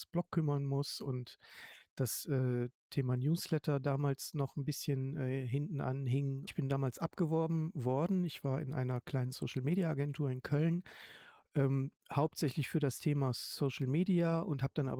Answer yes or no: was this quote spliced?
yes